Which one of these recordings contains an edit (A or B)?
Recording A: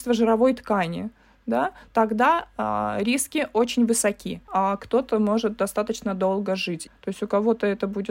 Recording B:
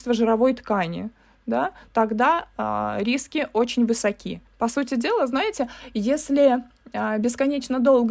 A